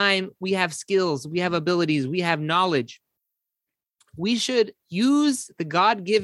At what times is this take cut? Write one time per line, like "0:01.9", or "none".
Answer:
0:04.8